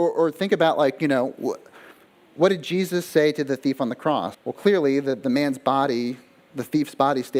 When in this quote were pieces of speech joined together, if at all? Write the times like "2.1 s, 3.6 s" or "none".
4.3 s